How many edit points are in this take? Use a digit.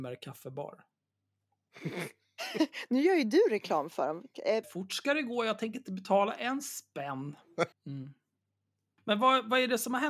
2